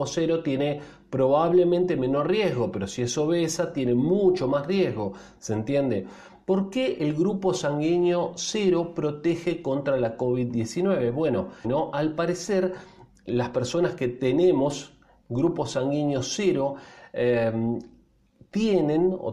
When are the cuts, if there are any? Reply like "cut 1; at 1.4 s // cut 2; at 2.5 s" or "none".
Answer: cut 1; at 11.6 s

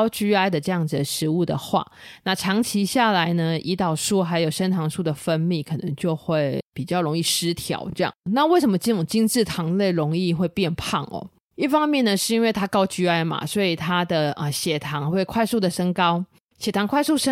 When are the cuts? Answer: none

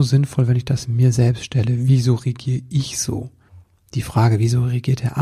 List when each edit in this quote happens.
none

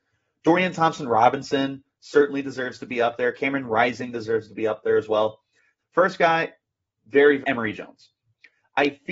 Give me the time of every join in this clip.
cut 1; at 5.8 s // cut 2; at 7.4 s

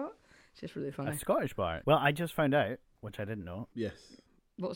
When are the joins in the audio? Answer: cut 1; at 1.8 s // cut 2; at 3.7 s

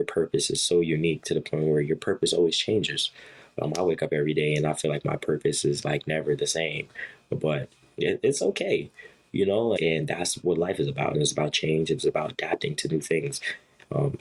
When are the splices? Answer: cut 1; at 9.8 s // cut 2; at 11.1 s

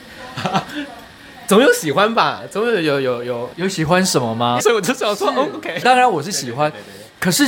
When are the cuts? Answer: cut 1; at 3.5 s // cut 2; at 4.6 s // cut 3; at 5.8 s

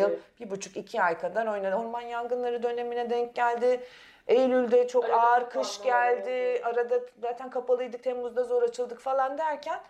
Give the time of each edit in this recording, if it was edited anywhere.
none

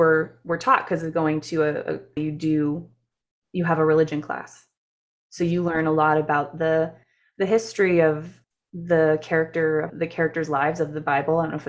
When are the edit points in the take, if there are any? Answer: cut 1; at 2.2 s // cut 2; at 9.9 s

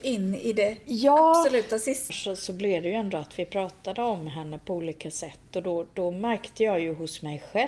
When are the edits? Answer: cut 1; at 2.1 s

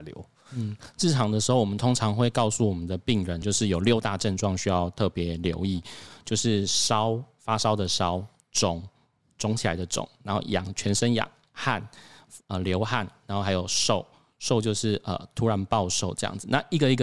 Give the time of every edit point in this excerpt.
cut 1; at 13.2 s

